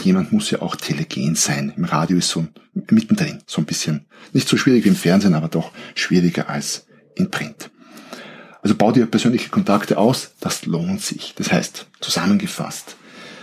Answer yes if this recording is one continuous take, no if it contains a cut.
yes